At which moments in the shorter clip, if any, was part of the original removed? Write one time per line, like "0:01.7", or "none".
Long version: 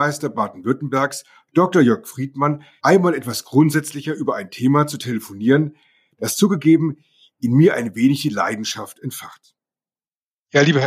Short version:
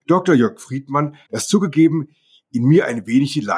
0:01.3

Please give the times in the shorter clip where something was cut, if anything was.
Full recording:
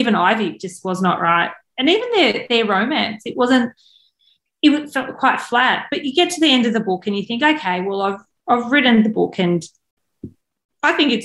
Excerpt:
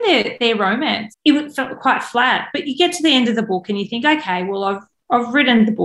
0:01.1

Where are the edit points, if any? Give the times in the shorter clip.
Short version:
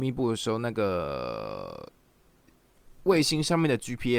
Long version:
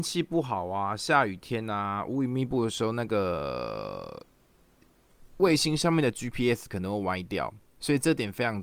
none

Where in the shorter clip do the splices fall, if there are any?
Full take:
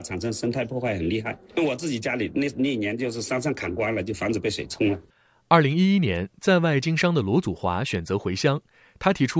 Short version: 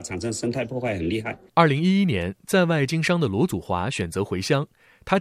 0:01.5

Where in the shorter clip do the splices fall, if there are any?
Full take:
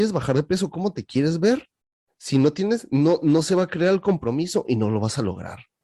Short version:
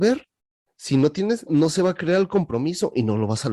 0:01.5

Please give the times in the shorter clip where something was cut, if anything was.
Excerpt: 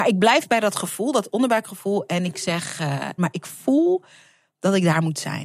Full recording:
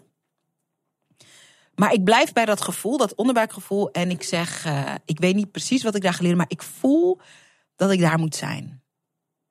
0:03.2

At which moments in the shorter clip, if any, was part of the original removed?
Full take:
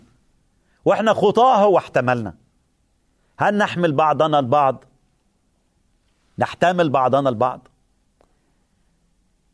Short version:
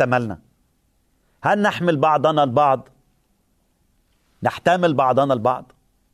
none

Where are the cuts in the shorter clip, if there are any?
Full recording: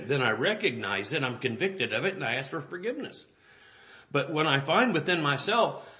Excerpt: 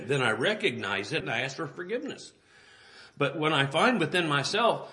0:01.2

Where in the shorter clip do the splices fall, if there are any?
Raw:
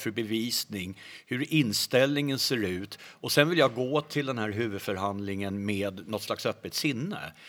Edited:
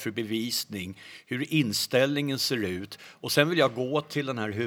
none

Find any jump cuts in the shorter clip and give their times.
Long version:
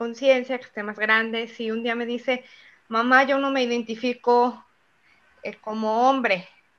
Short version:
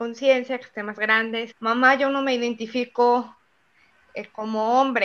0:01.5

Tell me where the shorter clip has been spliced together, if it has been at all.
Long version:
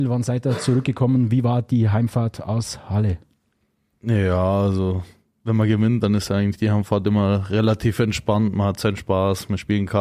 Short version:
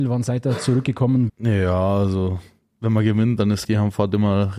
0:01.3
0:03.6

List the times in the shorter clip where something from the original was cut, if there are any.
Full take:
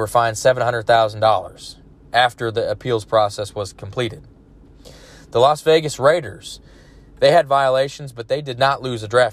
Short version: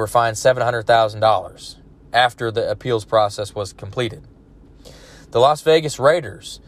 none

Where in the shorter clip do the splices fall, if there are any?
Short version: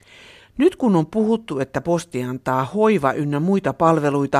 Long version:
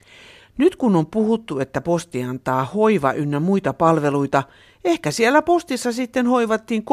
none

